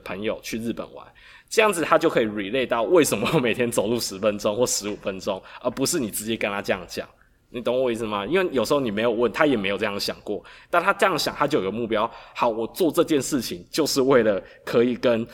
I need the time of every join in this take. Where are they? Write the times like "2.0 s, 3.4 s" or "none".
none